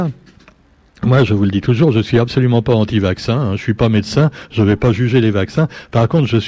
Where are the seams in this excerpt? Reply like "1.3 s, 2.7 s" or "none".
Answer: none